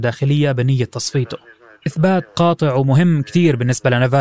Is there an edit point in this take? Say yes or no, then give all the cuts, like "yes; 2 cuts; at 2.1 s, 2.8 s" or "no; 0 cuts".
no; 0 cuts